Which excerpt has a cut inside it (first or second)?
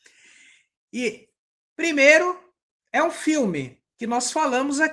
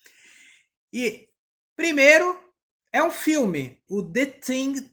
second